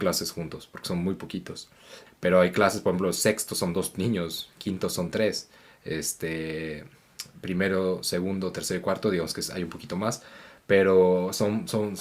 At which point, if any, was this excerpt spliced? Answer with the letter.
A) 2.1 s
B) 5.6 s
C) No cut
A